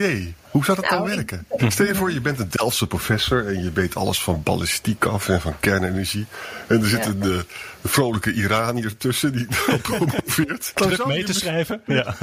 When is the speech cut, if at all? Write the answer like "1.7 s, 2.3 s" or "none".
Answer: 1.6 s